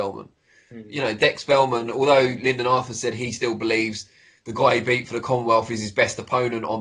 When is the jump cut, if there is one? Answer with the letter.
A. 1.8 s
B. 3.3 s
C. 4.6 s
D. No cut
D